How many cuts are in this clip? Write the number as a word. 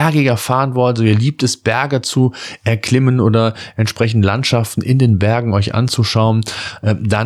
zero